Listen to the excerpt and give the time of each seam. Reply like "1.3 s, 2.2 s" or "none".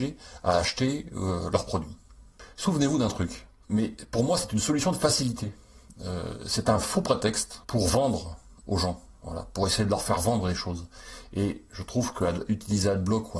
3.6 s